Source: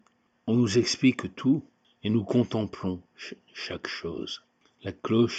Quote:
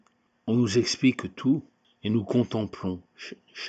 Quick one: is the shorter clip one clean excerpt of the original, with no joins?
yes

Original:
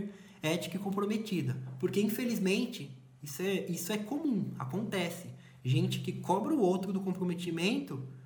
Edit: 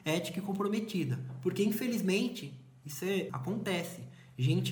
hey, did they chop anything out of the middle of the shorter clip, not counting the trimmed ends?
yes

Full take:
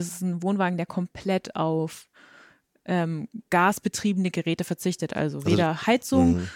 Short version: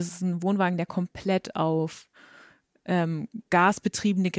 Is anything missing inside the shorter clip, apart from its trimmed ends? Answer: no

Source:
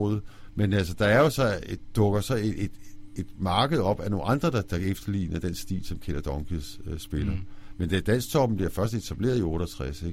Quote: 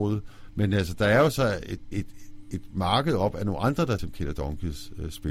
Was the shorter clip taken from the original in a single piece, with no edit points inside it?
no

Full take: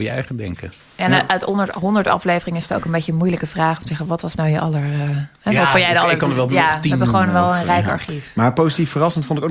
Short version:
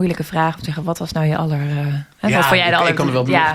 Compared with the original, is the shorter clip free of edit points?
yes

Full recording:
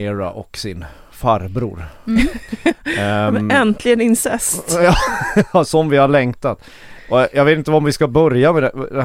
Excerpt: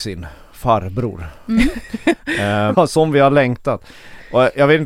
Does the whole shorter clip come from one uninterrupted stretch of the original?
no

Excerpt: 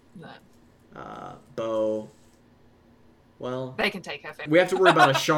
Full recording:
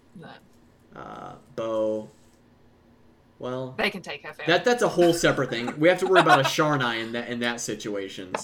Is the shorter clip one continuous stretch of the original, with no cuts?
no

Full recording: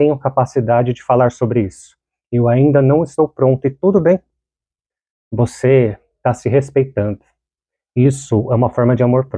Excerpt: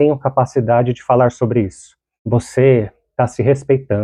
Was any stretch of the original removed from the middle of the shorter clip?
yes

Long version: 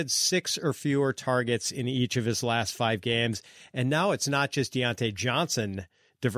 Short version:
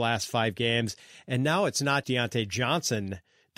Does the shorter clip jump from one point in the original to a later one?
yes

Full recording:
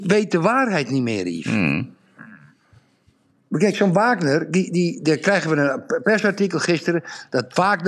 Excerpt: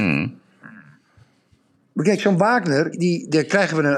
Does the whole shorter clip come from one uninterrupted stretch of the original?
no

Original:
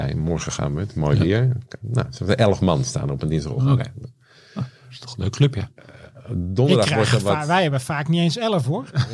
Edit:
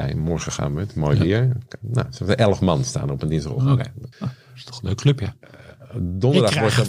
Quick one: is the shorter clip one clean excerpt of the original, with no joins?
no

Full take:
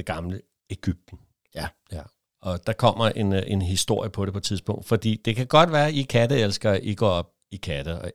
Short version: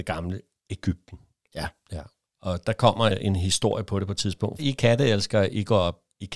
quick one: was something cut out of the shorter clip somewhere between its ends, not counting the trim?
yes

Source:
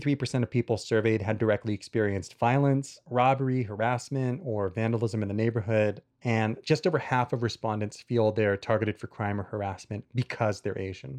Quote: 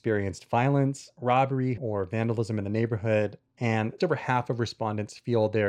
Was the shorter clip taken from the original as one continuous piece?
no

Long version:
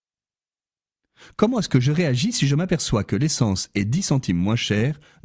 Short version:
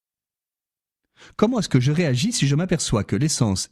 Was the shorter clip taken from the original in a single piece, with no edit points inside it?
yes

